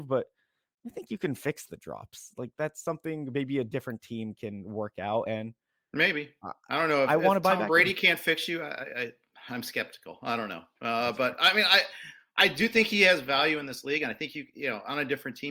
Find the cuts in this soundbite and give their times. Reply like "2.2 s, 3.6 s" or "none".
none

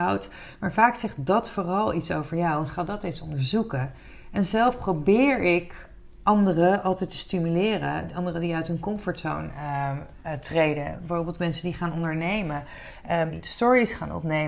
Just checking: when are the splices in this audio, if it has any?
13.3 s

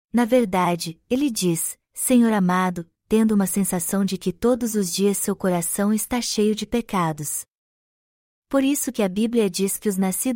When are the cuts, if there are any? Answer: 3.0 s

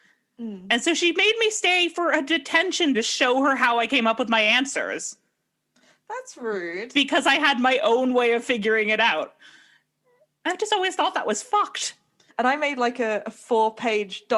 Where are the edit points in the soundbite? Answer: 2.9 s, 12.3 s

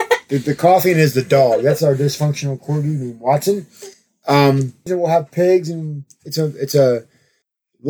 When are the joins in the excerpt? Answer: 4.9 s

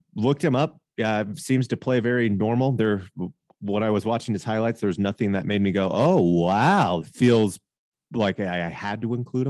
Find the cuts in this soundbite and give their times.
7.0 s

